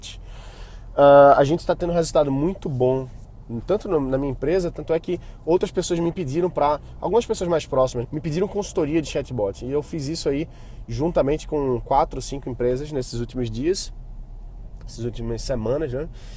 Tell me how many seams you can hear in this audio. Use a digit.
1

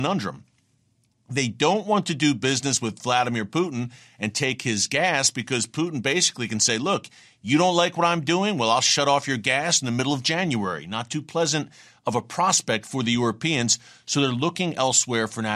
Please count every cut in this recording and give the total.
0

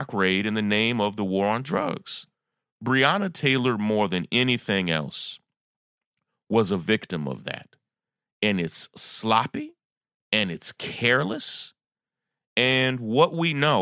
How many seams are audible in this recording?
0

